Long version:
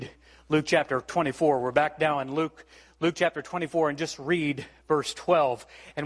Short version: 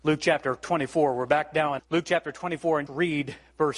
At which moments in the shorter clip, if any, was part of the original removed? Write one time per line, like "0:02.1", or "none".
0:01.8
0:02.9